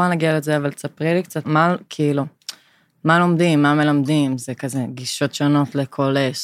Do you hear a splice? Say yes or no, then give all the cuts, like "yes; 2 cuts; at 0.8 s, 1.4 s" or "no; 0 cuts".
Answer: yes; 1 cut; at 1.4 s